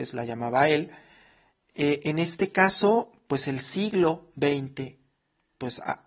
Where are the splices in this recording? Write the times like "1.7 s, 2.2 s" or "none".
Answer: none